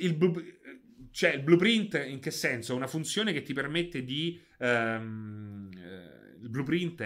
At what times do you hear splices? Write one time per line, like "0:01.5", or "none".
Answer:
none